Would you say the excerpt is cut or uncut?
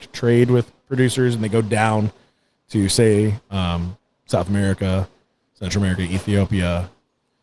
uncut